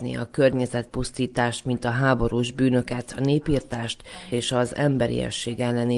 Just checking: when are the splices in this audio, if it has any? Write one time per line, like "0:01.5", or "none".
none